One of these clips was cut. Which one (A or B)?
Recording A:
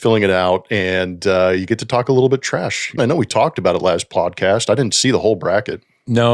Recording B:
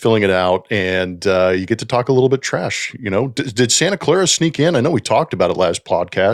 A